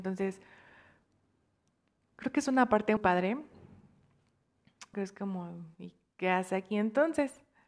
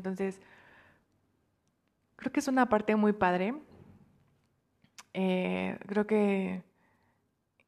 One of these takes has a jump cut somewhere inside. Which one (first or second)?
first